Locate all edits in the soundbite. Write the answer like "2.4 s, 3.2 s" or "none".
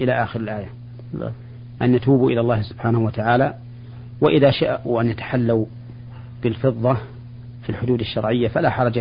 1.8 s